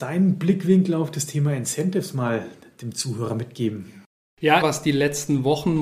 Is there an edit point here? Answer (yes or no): yes